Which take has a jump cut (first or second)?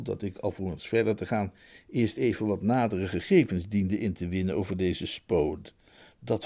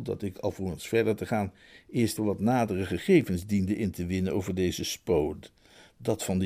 second